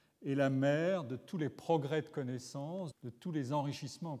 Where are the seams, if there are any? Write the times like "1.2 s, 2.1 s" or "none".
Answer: 2.9 s